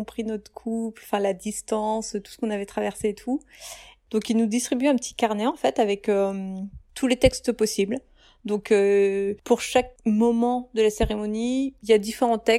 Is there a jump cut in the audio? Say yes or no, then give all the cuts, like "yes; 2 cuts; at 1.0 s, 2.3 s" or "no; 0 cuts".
no; 0 cuts